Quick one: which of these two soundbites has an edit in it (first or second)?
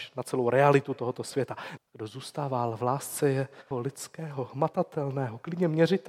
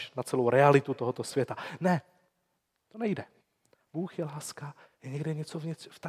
first